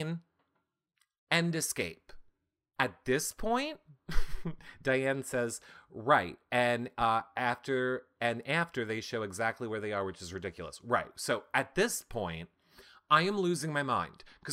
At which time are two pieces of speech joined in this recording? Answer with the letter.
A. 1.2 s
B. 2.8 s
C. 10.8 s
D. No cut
B